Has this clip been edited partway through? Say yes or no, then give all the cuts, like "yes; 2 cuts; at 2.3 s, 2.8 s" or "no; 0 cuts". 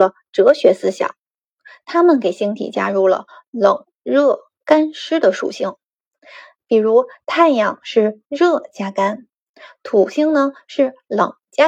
no; 0 cuts